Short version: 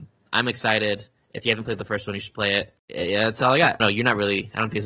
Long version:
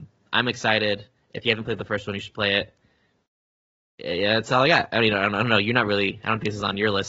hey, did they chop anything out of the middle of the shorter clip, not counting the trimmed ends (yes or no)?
yes